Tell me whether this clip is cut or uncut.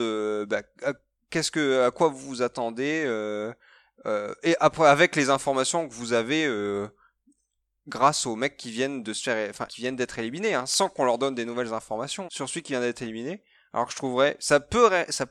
cut